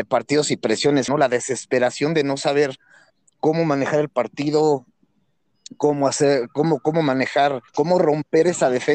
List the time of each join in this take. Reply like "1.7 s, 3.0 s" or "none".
1.1 s, 7.7 s